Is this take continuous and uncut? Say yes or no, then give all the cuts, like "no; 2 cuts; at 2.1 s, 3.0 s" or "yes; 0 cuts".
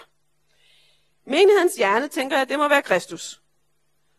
no; 1 cut; at 1.2 s